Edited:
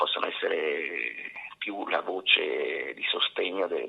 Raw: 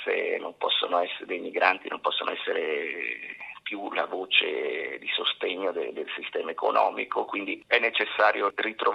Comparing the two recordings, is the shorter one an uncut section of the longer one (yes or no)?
yes